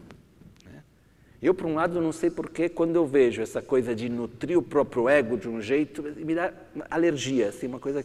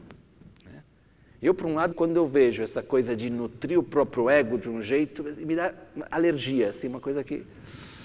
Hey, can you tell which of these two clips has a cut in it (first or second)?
second